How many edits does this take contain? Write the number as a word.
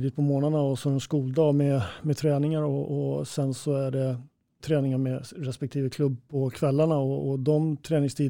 one